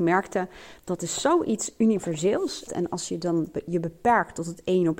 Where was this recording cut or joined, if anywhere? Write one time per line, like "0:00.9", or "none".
0:02.7